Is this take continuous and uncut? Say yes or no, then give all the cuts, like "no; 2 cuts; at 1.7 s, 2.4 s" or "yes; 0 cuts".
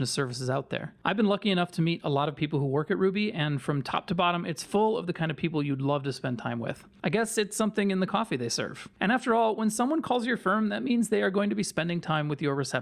yes; 0 cuts